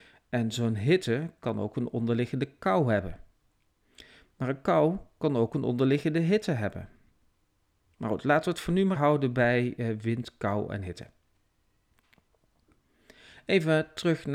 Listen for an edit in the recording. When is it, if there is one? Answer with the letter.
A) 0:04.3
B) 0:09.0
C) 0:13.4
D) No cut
B